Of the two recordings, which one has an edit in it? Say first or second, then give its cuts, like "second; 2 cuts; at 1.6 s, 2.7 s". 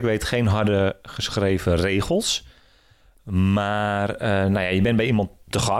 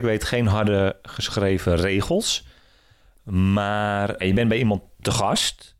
second; 1 cut; at 4.2 s